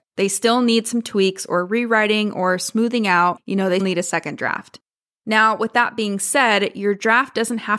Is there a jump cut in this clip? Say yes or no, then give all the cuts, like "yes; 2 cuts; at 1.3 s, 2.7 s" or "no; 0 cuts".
yes; 1 cut; at 3.8 s